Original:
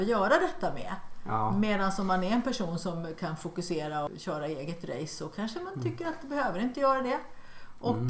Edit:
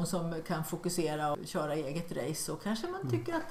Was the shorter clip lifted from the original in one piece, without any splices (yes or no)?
yes